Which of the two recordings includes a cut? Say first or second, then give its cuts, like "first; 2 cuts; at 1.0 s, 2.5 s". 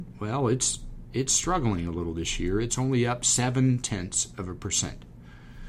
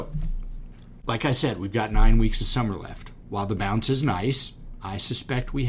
second; 1 cut; at 1.0 s